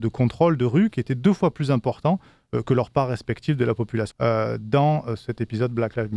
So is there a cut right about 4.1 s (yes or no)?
yes